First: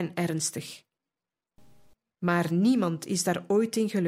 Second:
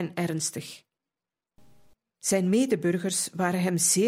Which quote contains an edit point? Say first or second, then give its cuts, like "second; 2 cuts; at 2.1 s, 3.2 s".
first; 1 cut; at 2.1 s